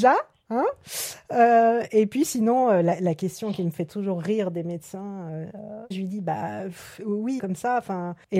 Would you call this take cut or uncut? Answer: cut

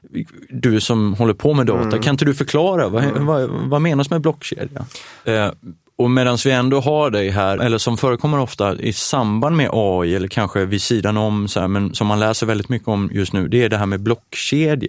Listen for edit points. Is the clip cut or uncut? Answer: cut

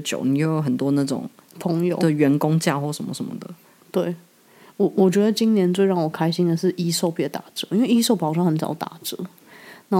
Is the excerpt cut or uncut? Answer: uncut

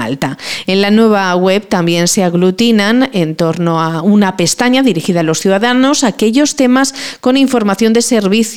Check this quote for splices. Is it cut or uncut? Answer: uncut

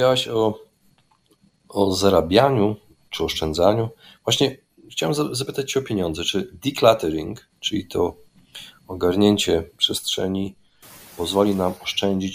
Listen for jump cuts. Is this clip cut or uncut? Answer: uncut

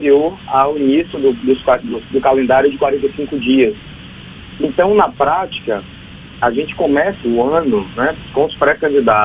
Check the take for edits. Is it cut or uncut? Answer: cut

